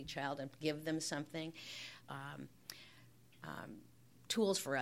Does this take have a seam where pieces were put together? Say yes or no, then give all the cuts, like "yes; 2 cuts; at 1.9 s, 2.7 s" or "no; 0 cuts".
yes; 1 cut; at 2.0 s